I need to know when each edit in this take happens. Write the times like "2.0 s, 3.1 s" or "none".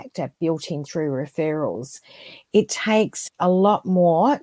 3.3 s